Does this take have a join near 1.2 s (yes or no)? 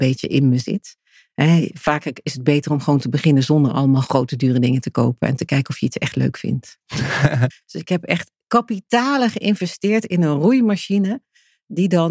no